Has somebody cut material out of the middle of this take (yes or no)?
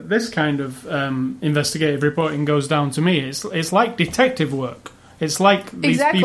no